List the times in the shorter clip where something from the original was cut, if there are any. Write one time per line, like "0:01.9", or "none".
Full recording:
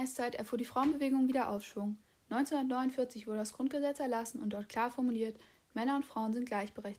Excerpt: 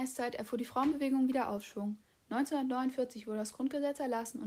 none